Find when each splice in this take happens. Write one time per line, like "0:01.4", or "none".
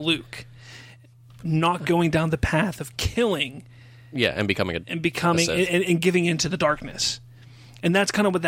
none